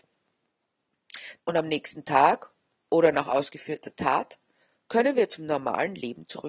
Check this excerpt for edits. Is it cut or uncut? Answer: cut